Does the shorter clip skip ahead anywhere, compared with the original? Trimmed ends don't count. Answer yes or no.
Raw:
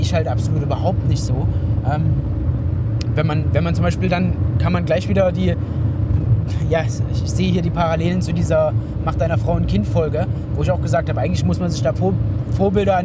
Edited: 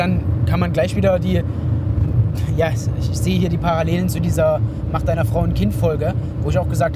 no